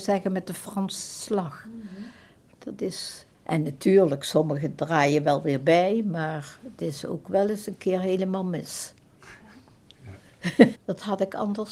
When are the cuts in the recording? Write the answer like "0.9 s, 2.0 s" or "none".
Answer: 3.3 s, 10.7 s